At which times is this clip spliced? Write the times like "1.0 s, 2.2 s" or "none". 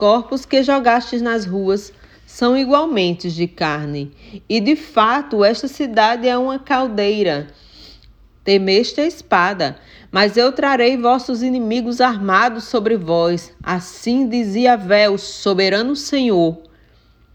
8.4 s